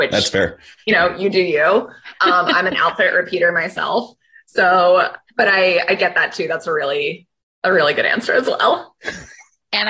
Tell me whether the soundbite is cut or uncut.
uncut